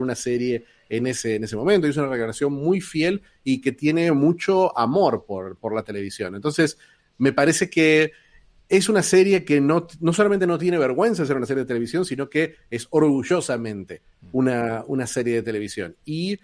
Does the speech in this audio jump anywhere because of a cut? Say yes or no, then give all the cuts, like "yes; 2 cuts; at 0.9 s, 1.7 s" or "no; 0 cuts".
no; 0 cuts